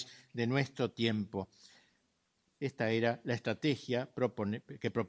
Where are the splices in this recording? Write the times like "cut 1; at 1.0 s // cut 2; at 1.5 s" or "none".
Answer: cut 1; at 2.6 s